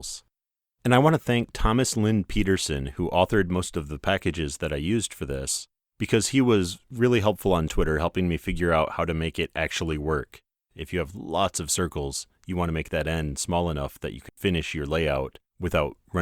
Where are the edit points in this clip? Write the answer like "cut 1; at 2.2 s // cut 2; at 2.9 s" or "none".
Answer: cut 1; at 10.7 s // cut 2; at 14.3 s